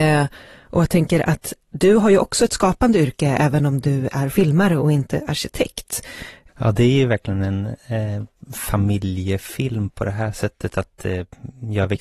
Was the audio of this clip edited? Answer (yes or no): yes